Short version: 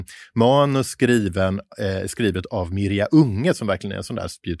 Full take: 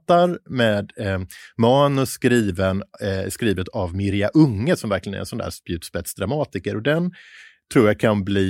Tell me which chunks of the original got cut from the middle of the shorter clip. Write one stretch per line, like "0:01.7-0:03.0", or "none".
none